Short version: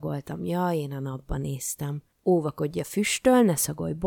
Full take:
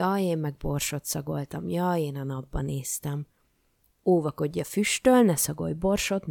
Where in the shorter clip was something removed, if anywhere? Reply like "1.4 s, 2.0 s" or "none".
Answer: 2.1 s